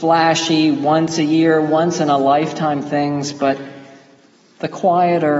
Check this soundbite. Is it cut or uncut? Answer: uncut